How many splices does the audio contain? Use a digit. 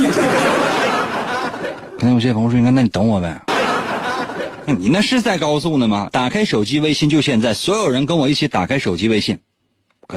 2